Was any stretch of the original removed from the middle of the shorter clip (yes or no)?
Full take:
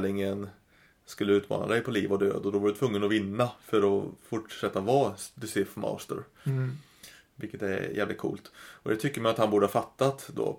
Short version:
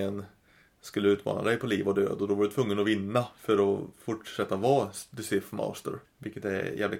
yes